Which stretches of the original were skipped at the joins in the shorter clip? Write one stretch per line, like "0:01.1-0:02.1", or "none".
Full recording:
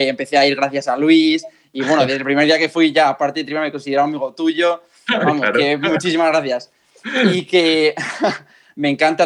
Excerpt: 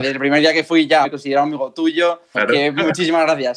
0:03.1-0:03.7
0:05.0-0:05.4